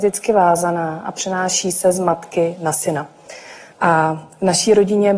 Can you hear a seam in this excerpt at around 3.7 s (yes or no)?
yes